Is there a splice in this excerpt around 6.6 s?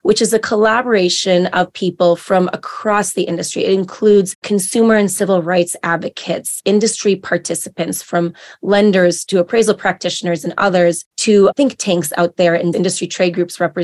no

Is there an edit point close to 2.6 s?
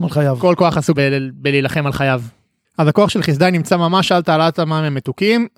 yes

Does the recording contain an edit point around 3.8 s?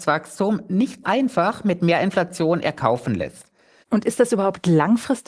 yes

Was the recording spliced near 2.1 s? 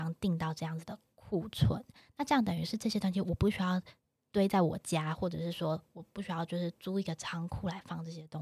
no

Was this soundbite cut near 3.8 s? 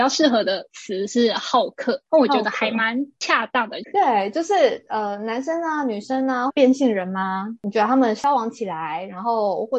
yes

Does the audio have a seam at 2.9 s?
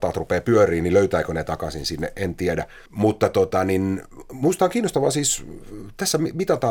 yes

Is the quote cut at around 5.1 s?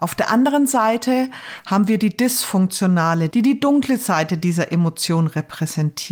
no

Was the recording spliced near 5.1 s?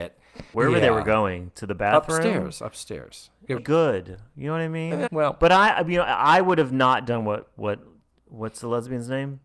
yes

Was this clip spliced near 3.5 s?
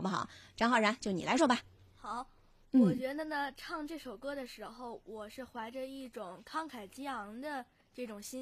no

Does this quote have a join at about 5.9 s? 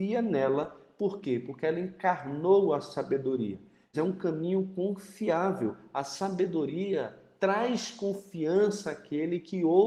no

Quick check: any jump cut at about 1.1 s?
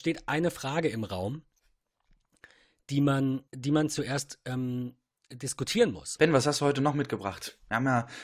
no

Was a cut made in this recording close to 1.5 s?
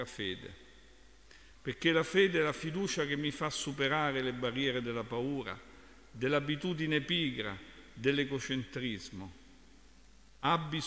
yes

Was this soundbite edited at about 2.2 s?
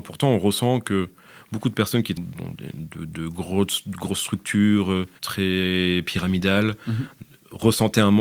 yes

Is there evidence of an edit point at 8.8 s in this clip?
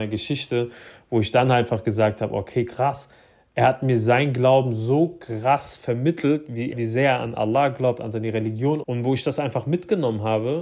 yes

